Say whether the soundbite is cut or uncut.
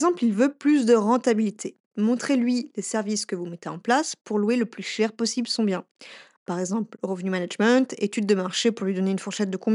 uncut